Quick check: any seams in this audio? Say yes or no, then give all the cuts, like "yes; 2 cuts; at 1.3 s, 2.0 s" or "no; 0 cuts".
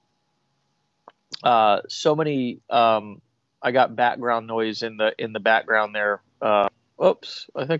no; 0 cuts